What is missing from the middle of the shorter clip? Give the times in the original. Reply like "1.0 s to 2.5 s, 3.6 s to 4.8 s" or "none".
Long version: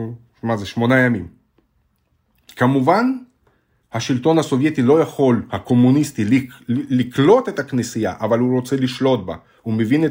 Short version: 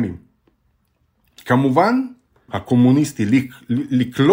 3.6 s to 5.5 s